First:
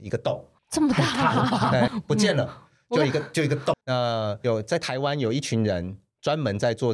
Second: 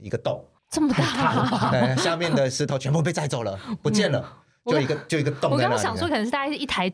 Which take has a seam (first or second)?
first